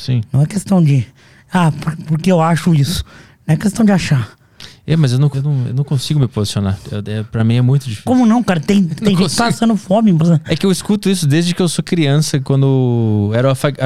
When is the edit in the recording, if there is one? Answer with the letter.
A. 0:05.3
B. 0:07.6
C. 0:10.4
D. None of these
A